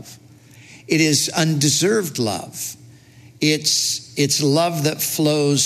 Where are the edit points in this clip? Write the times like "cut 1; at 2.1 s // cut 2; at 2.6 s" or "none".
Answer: none